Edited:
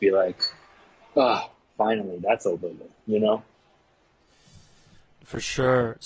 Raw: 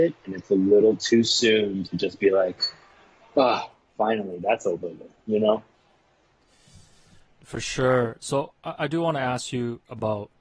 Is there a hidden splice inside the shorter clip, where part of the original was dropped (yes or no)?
no